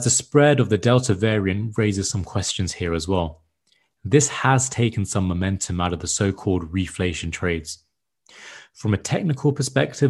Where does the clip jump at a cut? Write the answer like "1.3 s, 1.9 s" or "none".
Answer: none